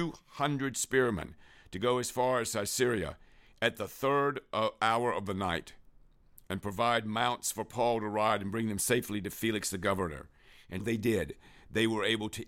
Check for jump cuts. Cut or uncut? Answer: cut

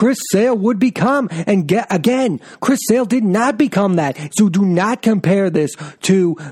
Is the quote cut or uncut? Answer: cut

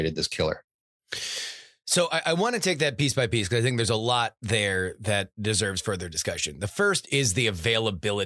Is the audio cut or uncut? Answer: uncut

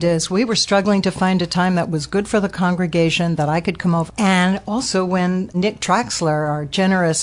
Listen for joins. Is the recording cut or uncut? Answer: cut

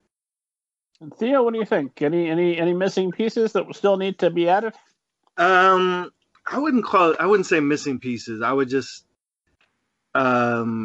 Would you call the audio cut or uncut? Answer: uncut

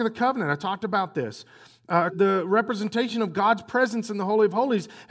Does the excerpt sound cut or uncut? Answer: cut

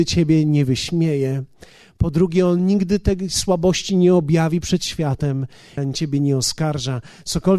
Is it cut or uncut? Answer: cut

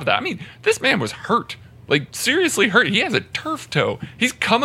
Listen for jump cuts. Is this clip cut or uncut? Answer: cut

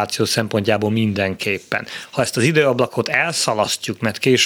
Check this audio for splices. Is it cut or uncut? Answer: uncut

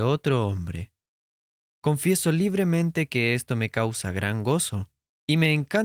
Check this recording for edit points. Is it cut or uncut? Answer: cut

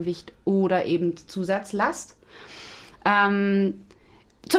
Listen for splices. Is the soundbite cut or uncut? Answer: uncut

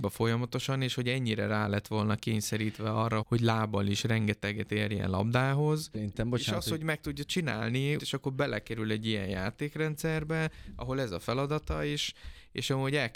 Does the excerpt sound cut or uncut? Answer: cut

